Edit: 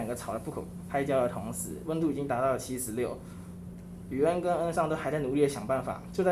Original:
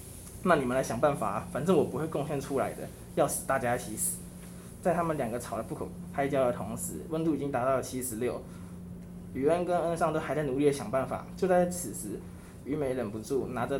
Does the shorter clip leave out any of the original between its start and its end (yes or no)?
no